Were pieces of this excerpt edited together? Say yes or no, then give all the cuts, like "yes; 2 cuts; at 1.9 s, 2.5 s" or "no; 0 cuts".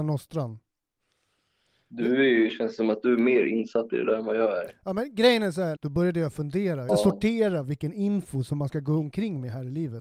yes; 2 cuts; at 5.8 s, 6.9 s